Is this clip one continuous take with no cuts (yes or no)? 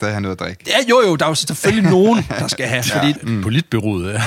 no